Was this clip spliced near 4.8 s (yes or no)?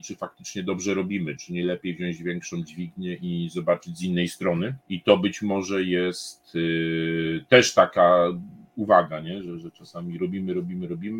yes